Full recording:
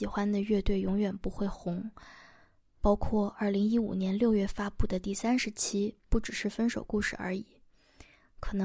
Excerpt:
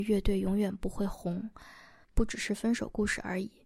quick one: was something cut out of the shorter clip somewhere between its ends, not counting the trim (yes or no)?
yes